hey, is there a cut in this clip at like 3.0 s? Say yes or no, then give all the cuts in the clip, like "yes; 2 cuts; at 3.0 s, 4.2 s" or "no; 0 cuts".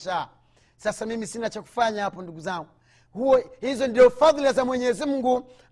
no; 0 cuts